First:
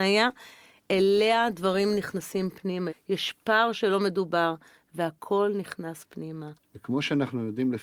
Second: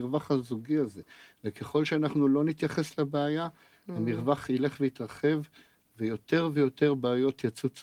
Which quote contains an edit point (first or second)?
first